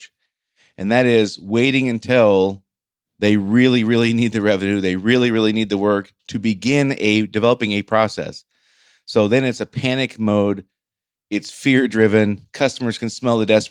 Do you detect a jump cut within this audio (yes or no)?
no